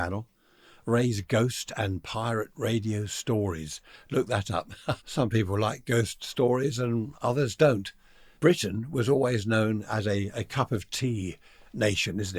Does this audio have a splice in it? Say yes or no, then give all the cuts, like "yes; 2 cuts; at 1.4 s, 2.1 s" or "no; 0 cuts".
yes; 2 cuts; at 5.0 s, 8.3 s